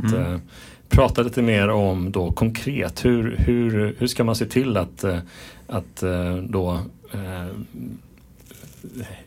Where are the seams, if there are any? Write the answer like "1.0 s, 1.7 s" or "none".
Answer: none